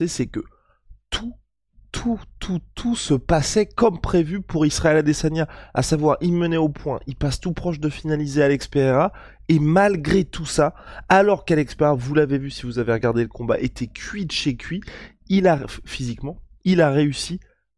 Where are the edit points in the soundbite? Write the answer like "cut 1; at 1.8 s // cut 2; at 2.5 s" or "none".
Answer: none